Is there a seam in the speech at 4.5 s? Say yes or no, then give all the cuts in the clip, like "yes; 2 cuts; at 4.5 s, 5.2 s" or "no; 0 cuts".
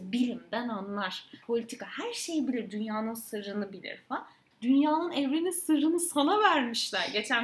yes; 2 cuts; at 1.4 s, 4.5 s